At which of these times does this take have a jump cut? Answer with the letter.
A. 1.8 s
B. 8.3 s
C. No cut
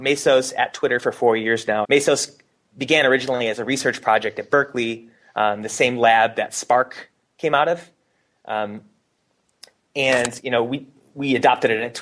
A